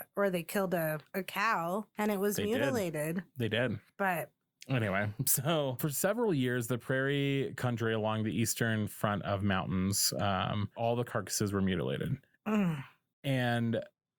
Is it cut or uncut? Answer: cut